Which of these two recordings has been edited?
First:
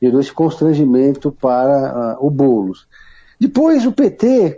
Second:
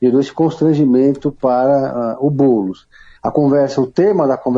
second; 1 cut; at 3.2 s

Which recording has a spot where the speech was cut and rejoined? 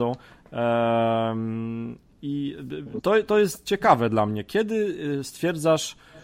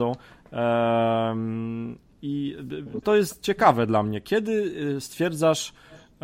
second; 1 cut; at 3.0 s

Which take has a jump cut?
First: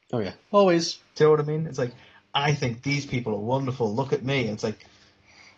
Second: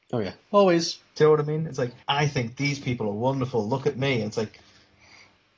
second; 1 cut; at 2.0 s

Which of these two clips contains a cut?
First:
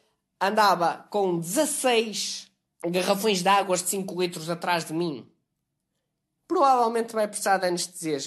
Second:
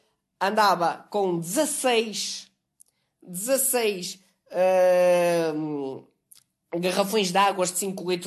first; 2 cuts; at 2.8 s, 6.4 s

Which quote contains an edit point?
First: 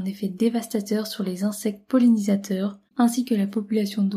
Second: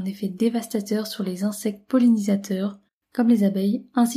first; 1 cut; at 2.9 s

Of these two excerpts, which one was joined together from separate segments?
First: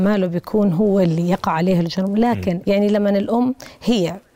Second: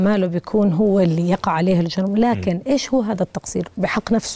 first; 1 cut; at 2.6 s

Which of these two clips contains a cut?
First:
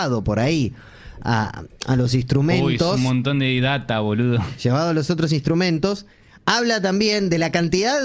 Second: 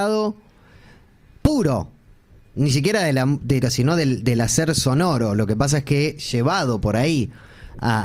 second; 1 cut; at 3.6 s

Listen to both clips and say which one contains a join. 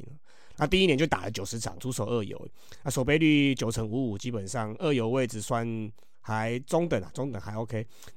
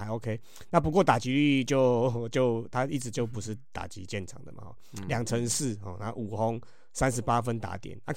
first; 1 cut; at 1.8 s

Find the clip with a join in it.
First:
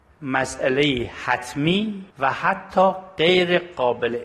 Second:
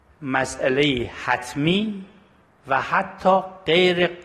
first; 1 cut; at 2.1 s

